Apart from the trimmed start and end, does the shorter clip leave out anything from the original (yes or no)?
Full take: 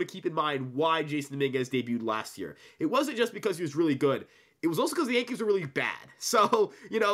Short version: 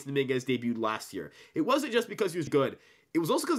yes